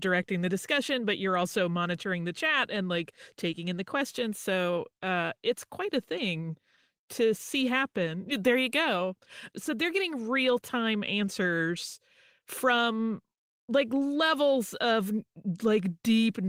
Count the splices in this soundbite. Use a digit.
1